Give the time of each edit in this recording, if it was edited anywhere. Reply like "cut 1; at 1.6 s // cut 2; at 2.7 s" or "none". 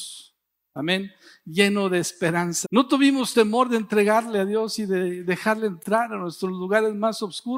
cut 1; at 2.6 s